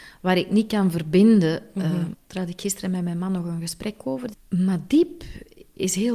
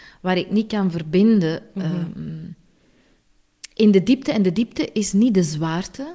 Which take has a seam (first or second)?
first